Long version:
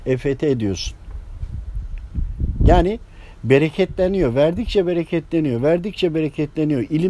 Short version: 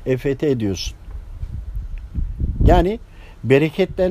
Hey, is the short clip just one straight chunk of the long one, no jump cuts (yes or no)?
yes